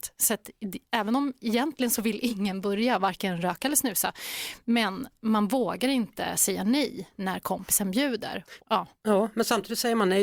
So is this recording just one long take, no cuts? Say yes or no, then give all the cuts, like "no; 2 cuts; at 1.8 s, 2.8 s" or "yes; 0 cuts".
no; 1 cut; at 8.6 s